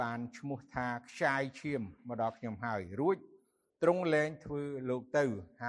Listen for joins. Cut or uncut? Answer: uncut